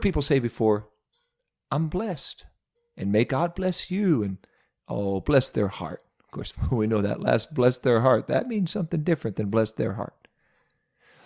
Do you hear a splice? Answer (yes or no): no